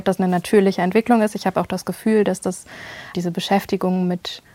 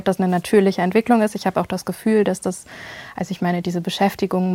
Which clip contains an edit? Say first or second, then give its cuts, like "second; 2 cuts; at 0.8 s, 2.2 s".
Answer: first; 1 cut; at 3.1 s